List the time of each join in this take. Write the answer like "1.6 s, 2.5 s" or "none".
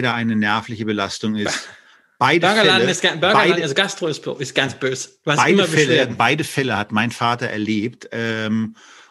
none